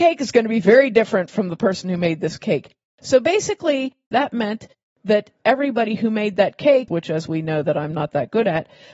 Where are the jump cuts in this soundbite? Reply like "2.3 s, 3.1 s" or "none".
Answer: 4.1 s, 6.9 s